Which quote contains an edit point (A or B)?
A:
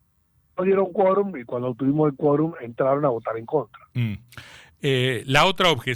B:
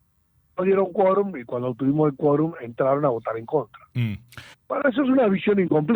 B